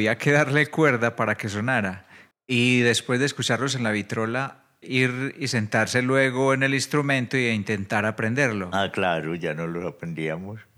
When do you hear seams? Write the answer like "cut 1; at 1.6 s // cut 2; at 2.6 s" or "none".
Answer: cut 1; at 2.3 s // cut 2; at 4.8 s